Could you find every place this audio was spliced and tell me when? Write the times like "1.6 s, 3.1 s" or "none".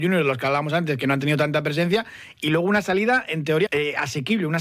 3.7 s